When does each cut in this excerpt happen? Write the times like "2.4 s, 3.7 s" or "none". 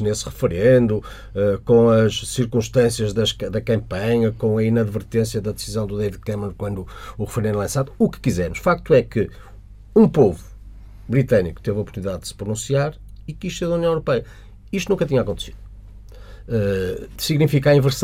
none